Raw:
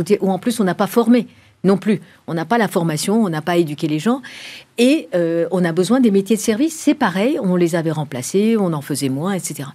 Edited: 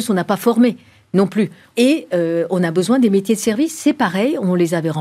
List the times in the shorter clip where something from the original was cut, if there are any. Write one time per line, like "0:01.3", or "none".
0:01.7